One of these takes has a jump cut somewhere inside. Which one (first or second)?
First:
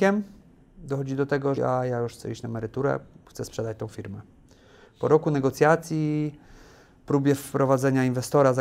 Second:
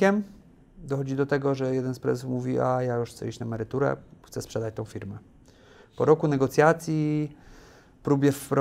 first